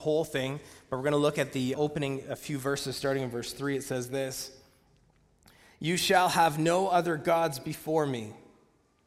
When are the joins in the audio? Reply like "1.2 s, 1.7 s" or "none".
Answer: 1.7 s